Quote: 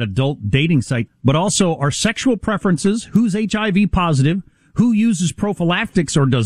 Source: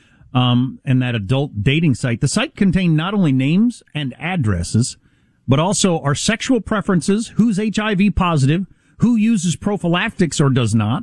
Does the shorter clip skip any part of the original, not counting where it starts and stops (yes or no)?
yes